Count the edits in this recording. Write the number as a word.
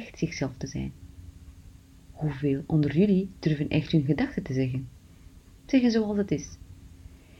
zero